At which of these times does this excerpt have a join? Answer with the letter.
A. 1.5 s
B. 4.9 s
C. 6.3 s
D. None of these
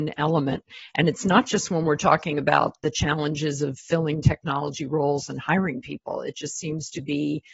D